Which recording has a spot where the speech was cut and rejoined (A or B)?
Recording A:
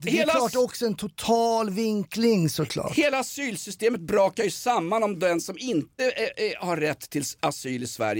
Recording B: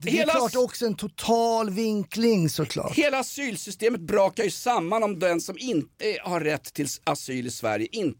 B